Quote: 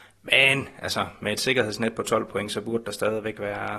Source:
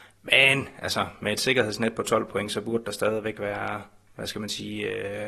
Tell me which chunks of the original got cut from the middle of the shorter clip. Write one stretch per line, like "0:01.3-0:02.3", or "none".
none

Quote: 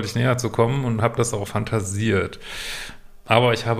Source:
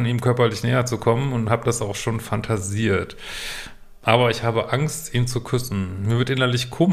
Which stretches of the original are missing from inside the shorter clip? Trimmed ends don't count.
0:01.9-0:02.2

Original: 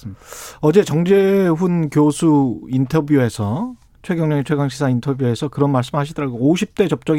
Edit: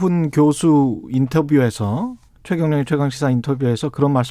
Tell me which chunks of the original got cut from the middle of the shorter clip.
none

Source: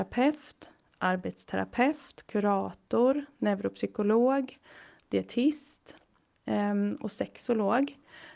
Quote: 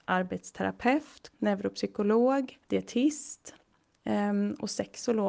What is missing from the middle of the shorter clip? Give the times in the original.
0:02.3-0:03.3
0:04.6-0:05.1

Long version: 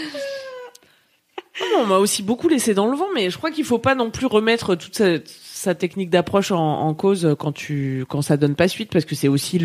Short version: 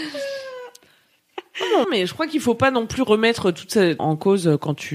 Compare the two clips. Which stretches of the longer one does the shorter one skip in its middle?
0:01.8-0:03.1
0:05.2-0:06.8

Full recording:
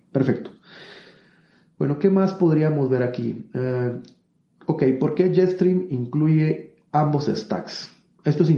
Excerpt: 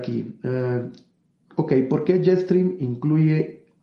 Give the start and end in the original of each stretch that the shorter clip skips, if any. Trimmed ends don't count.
none

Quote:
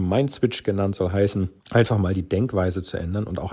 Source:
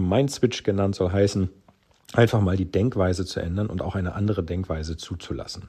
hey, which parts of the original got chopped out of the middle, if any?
0:01.6-0:02.0

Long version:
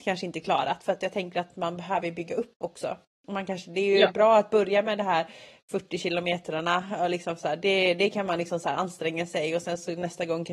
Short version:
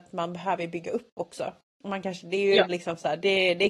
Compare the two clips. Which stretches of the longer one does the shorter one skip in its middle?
0:04.1-0:07.1

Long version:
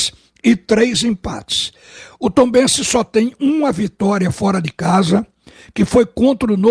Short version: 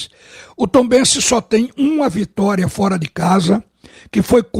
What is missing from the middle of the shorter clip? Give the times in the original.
none

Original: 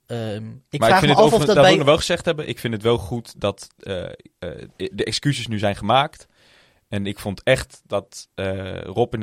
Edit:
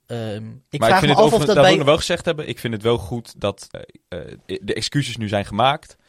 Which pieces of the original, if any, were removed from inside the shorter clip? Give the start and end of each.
0:03.7-0:04.0

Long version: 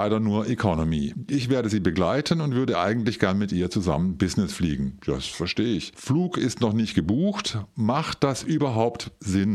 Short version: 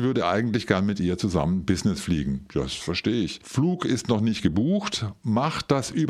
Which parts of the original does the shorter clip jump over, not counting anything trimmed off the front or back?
none

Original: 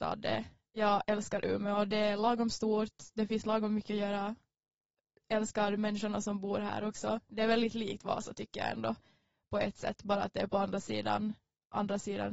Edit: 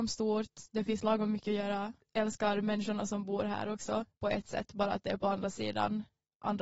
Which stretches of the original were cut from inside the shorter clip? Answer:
0:04.4-0:05.2
0:07.2-0:09.4

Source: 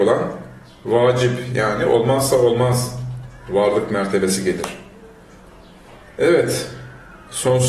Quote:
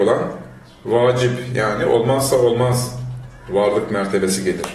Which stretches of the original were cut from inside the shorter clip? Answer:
none

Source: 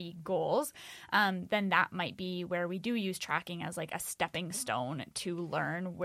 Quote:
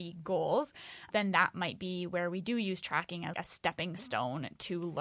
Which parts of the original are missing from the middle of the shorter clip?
0:01.1-0:01.5
0:03.7-0:03.9

